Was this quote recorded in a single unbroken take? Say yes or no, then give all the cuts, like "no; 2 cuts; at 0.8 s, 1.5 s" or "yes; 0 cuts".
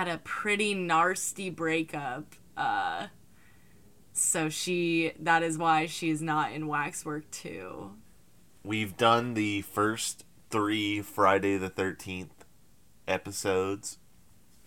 yes; 0 cuts